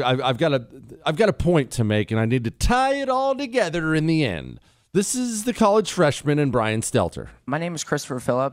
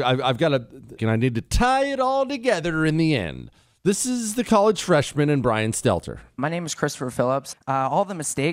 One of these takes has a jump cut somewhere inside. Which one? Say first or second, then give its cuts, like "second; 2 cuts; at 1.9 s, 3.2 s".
second; 2 cuts; at 1.0 s, 7.5 s